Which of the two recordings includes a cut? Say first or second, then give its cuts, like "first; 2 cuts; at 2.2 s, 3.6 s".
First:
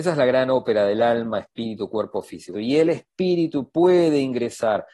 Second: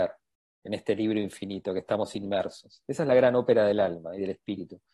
first; 1 cut; at 2.5 s